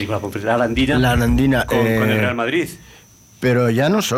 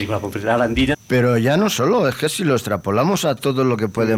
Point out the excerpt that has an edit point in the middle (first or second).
second